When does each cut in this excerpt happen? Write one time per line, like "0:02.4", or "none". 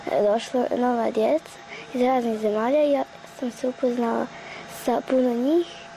none